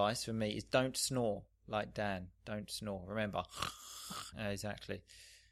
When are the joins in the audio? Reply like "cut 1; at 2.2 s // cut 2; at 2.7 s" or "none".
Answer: cut 1; at 4.3 s